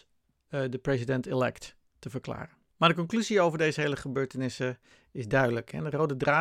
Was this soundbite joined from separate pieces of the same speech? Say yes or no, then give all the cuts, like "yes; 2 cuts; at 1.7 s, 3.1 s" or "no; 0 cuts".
yes; 1 cut; at 2.7 s